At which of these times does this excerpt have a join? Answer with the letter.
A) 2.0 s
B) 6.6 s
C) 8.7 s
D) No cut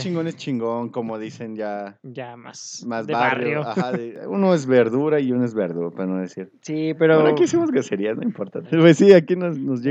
C